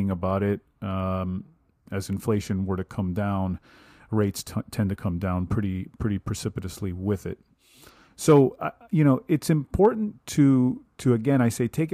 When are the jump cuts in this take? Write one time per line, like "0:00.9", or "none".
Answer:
none

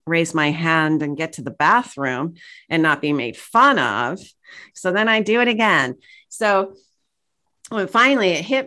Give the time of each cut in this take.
0:04.7

